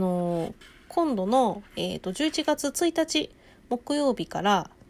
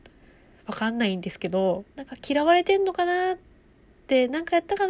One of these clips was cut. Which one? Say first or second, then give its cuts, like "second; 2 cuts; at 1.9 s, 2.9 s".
second; 1 cut; at 1.9 s